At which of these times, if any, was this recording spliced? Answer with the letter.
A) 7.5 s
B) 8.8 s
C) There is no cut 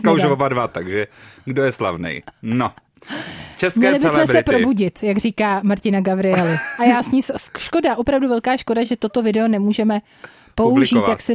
C